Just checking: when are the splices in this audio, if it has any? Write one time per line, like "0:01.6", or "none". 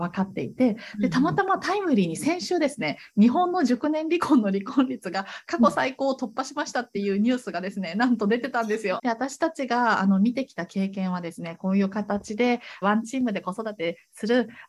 0:09.0
0:12.8